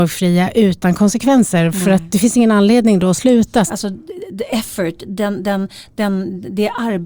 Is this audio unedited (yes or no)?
no